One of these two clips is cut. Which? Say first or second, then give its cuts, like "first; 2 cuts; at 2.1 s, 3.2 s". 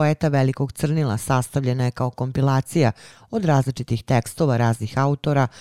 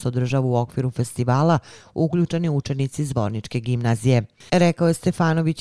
second; 1 cut; at 4.5 s